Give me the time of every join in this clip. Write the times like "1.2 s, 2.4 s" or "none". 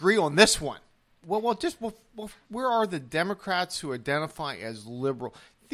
1.2 s, 2.4 s